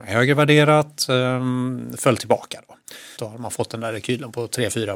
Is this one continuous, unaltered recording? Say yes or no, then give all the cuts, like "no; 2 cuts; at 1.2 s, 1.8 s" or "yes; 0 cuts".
no; 1 cut; at 3.2 s